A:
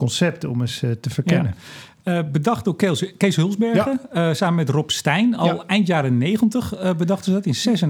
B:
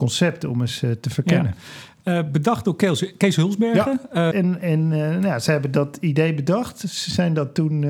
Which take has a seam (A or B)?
B